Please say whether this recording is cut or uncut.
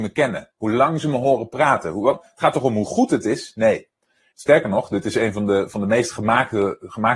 cut